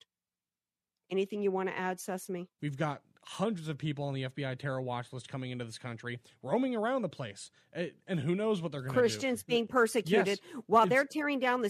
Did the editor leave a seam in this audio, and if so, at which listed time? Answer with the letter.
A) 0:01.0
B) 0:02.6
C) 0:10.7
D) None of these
B